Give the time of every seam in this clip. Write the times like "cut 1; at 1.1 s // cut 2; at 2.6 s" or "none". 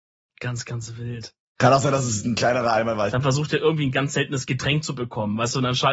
cut 1; at 3.1 s